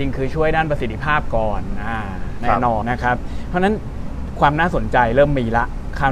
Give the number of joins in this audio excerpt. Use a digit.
1